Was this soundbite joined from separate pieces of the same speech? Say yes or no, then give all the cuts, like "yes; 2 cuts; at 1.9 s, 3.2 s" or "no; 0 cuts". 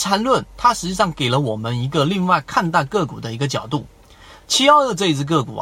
no; 0 cuts